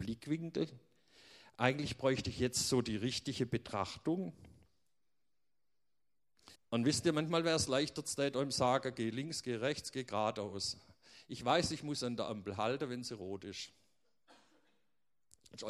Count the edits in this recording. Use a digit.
1